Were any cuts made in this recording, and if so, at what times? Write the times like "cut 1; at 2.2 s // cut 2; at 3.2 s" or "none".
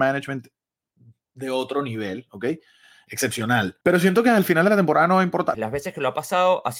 cut 1; at 3.8 s // cut 2; at 5.5 s